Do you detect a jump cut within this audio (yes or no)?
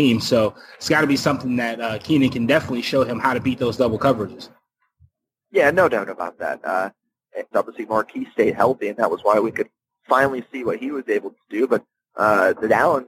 yes